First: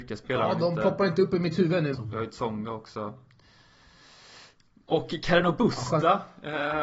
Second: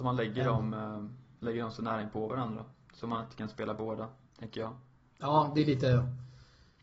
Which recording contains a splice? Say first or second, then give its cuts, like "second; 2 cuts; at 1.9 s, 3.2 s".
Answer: first; 1 cut; at 1.9 s